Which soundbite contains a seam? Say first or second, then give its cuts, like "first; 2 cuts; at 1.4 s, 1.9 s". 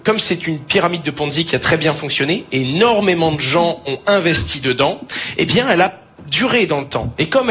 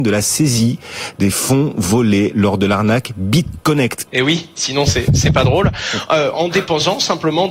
second; 1 cut; at 4.1 s